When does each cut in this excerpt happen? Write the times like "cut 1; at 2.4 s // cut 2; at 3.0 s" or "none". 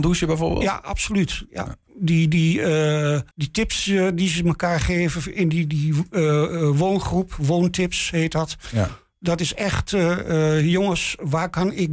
cut 1; at 3.3 s